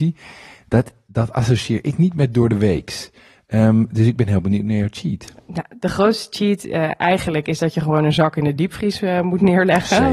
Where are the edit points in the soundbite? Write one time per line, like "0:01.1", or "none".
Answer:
none